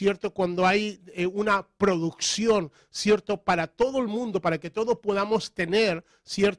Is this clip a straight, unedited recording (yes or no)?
yes